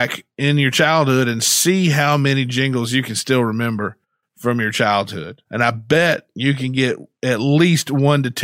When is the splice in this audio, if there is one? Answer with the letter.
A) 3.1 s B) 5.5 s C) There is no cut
B